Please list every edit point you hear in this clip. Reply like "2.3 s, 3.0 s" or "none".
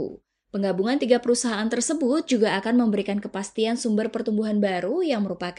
none